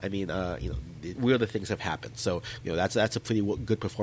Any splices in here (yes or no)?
yes